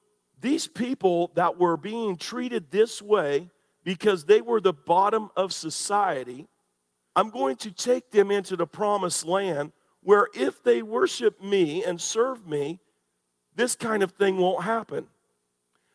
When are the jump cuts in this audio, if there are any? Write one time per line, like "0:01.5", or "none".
0:07.1